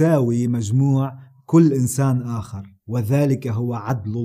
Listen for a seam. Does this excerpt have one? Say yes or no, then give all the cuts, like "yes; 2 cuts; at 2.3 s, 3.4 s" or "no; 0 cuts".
yes; 1 cut; at 2.8 s